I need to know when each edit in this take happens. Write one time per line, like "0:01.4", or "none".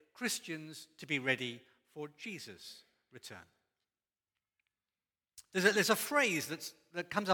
0:05.5